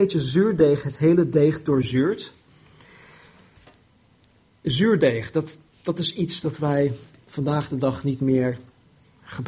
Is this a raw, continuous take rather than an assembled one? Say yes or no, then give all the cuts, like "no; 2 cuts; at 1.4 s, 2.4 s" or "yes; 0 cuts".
yes; 0 cuts